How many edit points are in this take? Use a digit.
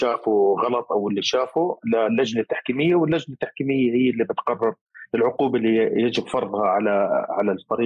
0